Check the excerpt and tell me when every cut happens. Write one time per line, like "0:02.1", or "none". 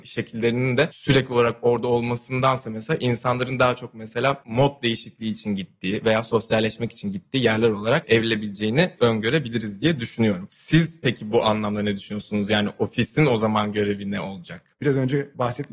0:14.7